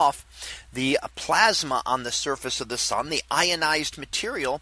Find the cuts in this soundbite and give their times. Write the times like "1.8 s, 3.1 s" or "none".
none